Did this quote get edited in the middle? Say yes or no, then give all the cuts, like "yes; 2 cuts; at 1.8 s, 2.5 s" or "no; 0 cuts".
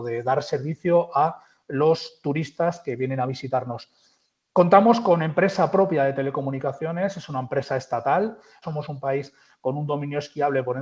yes; 1 cut; at 8.6 s